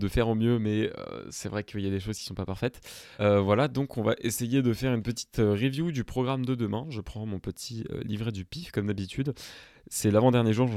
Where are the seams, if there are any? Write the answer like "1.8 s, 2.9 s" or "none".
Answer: 3.2 s